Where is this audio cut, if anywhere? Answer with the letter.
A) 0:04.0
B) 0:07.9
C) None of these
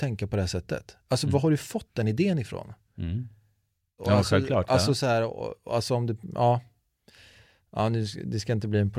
A